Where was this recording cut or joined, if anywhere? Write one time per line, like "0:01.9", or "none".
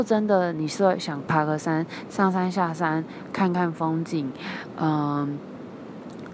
none